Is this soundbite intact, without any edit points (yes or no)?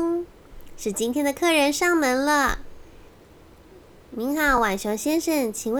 yes